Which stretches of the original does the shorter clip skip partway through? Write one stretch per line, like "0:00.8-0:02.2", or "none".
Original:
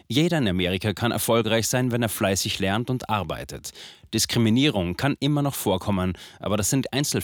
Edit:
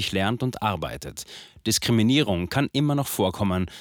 none